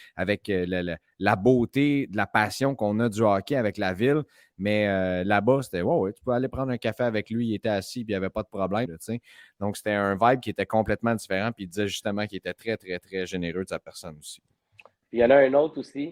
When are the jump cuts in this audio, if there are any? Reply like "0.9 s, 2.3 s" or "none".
8.9 s

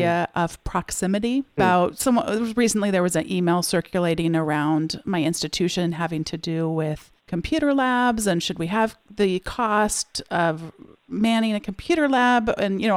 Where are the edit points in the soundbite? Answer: 1.6 s, 7.2 s

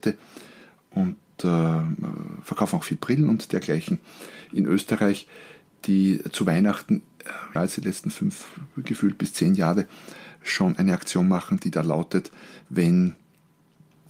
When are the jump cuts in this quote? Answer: 7.6 s

